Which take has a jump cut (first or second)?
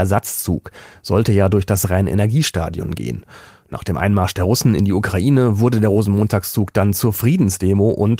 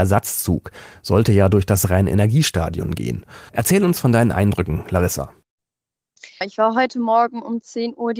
second